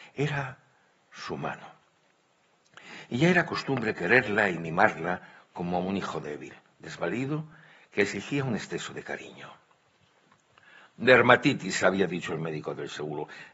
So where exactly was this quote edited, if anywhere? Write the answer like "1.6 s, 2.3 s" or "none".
none

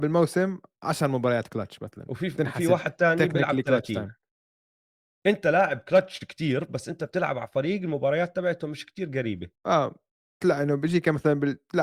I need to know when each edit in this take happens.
5.2 s, 9.6 s

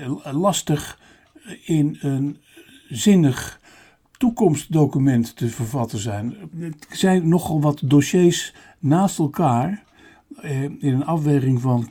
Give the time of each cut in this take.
6.5 s

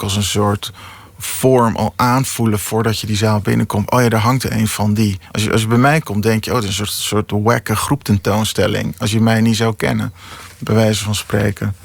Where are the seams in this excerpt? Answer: none

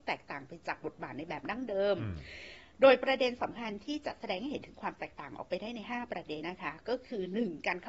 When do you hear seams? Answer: 6.4 s

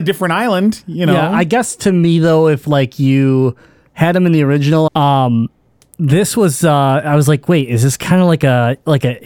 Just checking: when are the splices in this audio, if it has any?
4.9 s

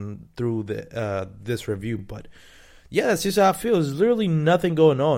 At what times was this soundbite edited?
none

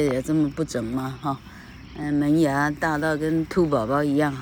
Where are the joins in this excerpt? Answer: none

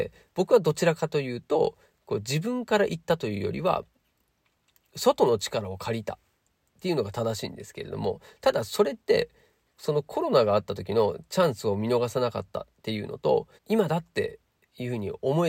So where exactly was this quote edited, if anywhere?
13.6 s

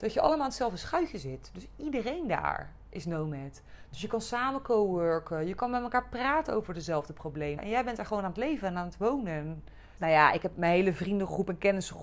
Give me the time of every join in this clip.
7.6 s, 10.0 s

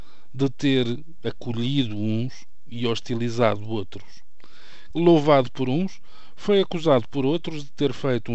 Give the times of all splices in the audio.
4.9 s

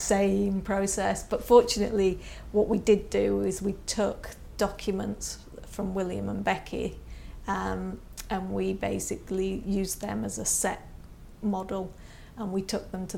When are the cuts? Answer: none

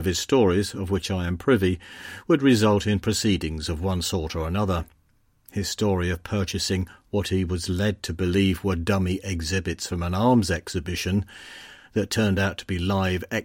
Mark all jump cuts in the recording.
none

